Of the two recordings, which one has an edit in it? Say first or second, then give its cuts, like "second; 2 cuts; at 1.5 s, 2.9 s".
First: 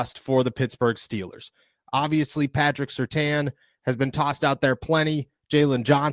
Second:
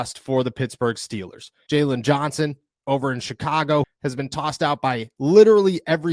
second; 2 cuts; at 1.7 s, 3.8 s